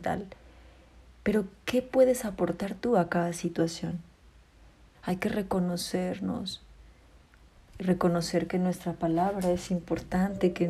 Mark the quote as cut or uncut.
cut